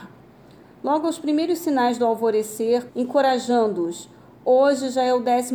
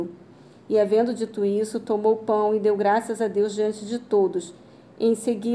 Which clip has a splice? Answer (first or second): first